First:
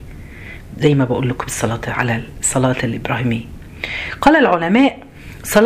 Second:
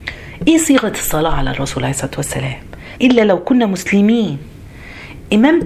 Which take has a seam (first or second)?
second